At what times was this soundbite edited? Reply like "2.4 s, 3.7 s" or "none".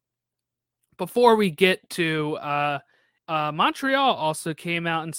3.2 s